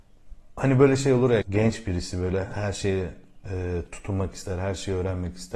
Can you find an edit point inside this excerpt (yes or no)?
yes